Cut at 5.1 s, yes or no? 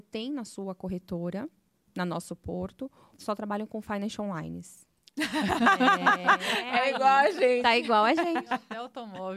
yes